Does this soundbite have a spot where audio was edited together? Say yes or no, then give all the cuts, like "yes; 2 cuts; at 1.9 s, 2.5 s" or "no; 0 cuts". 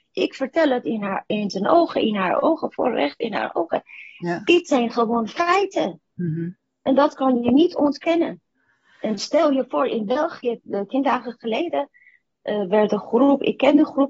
yes; 1 cut; at 10.6 s